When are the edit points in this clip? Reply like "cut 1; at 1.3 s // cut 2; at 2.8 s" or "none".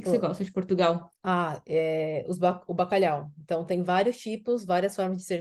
none

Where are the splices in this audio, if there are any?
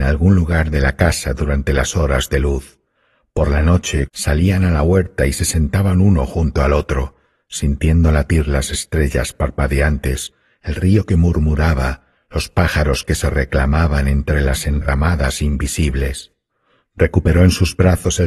cut 1; at 4.1 s

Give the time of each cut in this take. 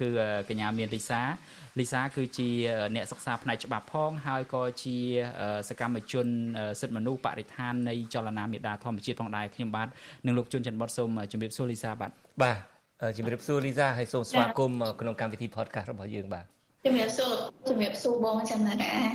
none

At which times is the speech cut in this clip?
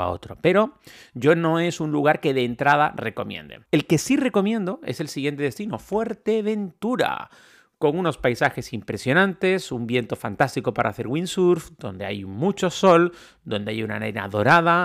cut 1; at 3.7 s

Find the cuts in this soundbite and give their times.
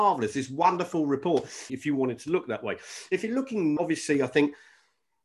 cut 1; at 1.7 s // cut 2; at 3.8 s

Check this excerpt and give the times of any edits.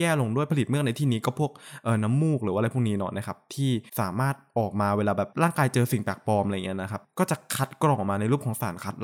cut 1; at 3.9 s

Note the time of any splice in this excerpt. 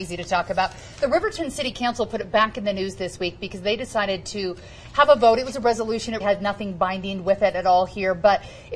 cut 1; at 6.2 s

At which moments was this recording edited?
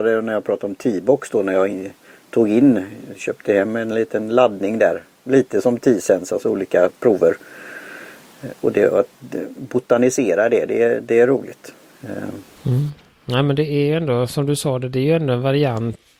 none

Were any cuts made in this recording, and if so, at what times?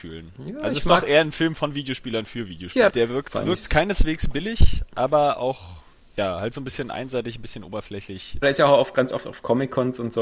cut 1; at 2.9 s // cut 2; at 8.4 s

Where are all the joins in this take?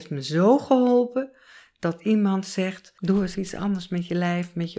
cut 1; at 3.3 s

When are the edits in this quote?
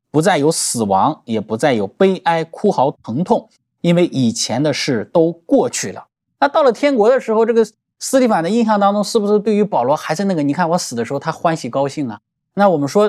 cut 1; at 6.3 s

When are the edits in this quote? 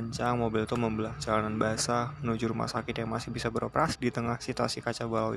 cut 1; at 4.0 s

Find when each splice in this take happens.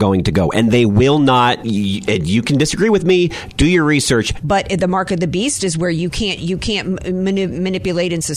cut 1; at 4.4 s

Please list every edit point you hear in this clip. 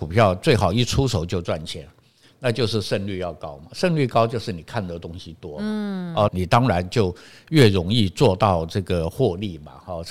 cut 1; at 6.3 s

